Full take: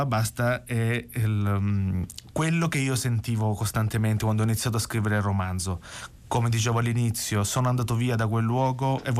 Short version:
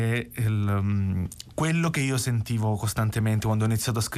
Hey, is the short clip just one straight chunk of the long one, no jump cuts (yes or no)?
yes